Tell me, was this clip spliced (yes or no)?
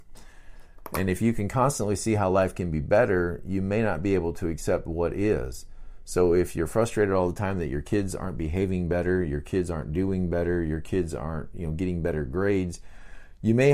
no